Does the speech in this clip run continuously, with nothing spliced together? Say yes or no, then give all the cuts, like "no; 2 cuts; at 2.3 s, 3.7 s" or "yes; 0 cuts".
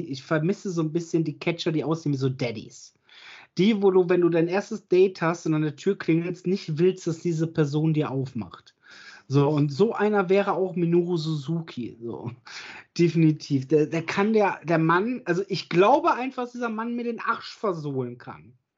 yes; 0 cuts